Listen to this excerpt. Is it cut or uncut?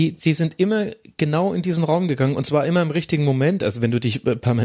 uncut